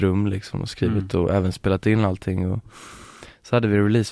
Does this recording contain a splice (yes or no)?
no